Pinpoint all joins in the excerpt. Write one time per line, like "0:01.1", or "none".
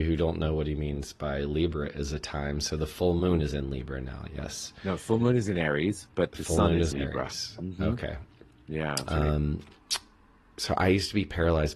0:06.9
0:09.1